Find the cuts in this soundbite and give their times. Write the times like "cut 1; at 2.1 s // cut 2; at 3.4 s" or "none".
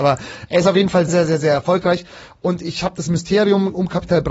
cut 1; at 1.1 s